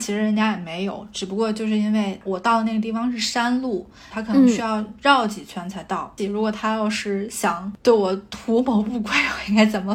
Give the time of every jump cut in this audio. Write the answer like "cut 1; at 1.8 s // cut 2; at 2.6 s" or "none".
cut 1; at 4.1 s // cut 2; at 6.2 s